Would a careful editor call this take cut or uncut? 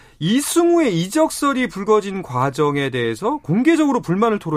uncut